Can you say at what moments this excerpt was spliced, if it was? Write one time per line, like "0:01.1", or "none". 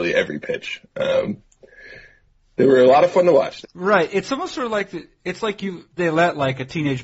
0:03.6
0:06.0